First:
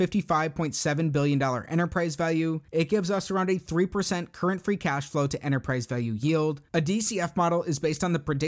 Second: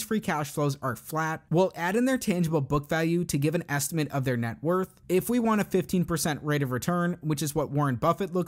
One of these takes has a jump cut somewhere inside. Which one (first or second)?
first